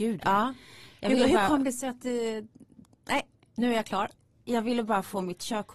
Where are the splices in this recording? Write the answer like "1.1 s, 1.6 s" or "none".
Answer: none